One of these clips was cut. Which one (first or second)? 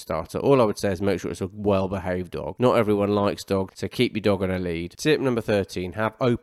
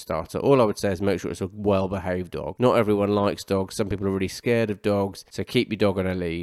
first